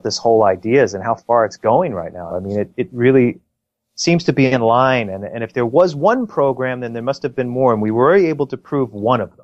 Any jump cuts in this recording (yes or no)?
yes